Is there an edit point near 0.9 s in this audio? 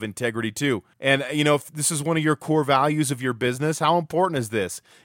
yes; 1 cut; at 0.9 s

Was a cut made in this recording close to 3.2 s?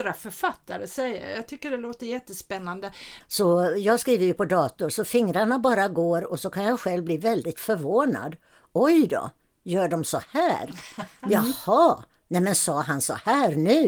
yes; 1 cut; at 3.2 s

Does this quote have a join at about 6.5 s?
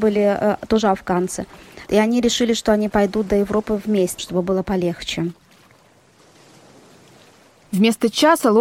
no; 2 cuts; at 1.9 s, 4.2 s

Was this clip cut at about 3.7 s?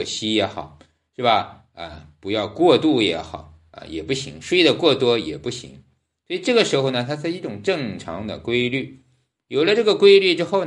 yes; 1 cut; at 3.7 s

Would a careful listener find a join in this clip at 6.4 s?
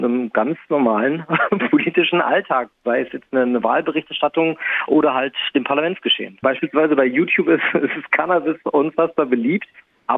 yes; 1 cut; at 6.4 s

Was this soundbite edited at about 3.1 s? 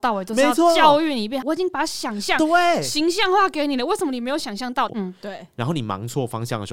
no; 2 cuts; at 1.4 s, 4.9 s

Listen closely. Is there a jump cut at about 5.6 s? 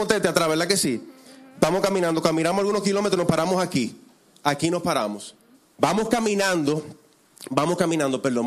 yes; 1 cut; at 5.6 s

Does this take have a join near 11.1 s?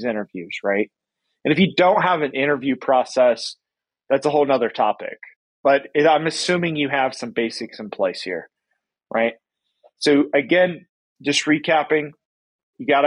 no; 0 cuts

